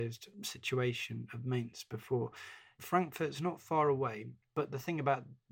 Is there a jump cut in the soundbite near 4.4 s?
yes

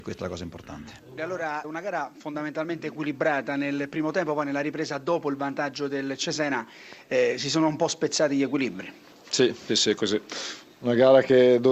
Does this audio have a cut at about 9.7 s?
yes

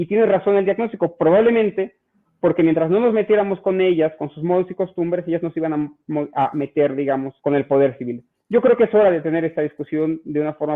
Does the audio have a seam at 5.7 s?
no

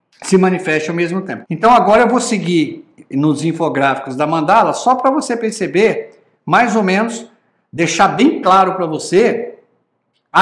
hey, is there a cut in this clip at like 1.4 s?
yes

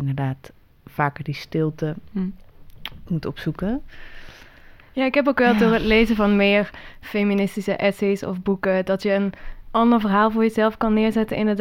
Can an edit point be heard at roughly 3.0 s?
no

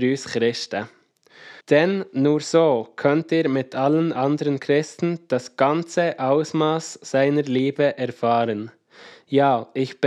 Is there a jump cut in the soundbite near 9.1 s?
no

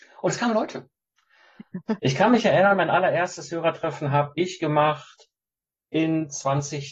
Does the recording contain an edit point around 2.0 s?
yes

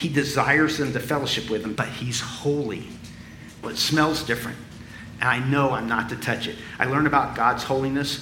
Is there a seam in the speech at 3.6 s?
yes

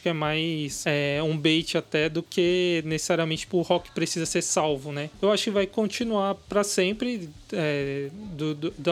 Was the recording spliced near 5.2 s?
no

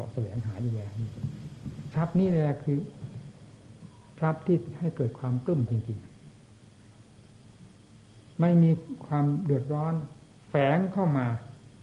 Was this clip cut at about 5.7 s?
yes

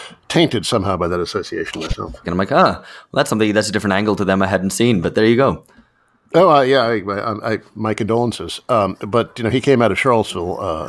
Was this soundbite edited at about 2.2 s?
yes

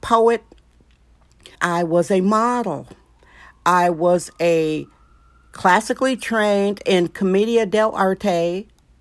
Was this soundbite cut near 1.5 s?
yes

